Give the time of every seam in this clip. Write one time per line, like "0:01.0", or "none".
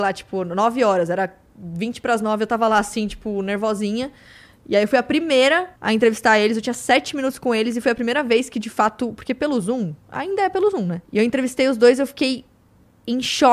0:05.8
0:11.0